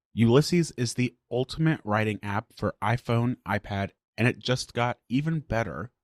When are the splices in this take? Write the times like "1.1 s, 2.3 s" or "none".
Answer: 4.0 s